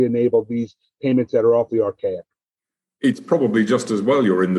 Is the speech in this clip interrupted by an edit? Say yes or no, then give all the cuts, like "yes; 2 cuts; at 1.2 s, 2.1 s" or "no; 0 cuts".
no; 0 cuts